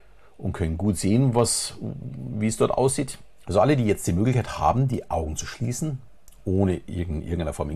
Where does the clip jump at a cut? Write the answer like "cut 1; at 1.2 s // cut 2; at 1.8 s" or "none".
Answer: cut 1; at 3.4 s